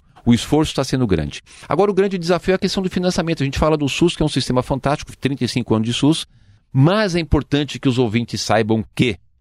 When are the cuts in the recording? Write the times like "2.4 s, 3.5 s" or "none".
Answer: none